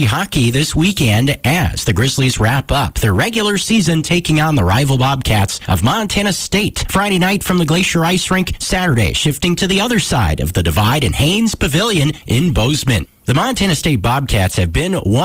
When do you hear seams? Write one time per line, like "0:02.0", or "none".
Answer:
none